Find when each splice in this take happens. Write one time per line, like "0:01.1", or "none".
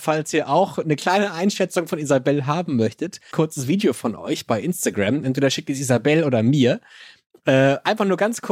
0:03.3